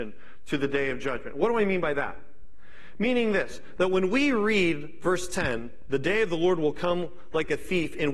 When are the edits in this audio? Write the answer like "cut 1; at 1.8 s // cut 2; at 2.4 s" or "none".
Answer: none